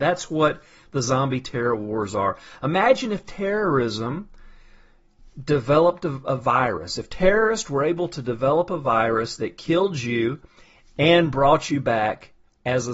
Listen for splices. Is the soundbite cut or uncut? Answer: uncut